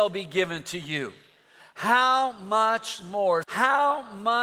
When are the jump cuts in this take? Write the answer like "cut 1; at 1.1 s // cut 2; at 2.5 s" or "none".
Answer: cut 1; at 1.6 s // cut 2; at 3.4 s